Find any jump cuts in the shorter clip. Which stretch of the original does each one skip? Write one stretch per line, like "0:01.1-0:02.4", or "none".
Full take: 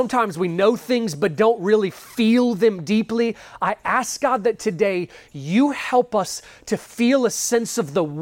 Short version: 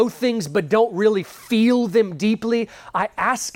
none